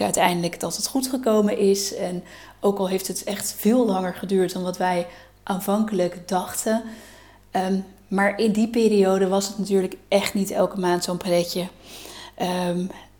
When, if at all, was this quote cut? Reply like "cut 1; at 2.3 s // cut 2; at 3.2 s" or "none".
none